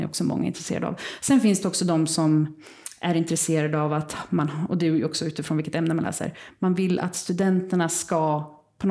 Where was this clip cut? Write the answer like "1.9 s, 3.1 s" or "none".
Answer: none